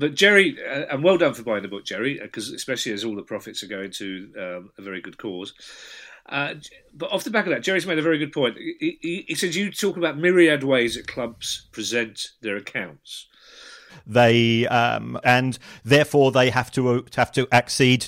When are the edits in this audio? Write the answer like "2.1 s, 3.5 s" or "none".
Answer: 13.9 s, 15.2 s